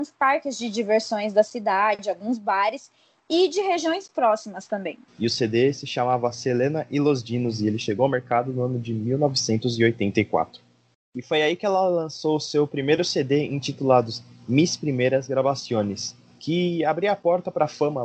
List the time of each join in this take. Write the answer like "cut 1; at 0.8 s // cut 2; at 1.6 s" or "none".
cut 1; at 5.1 s // cut 2; at 10.9 s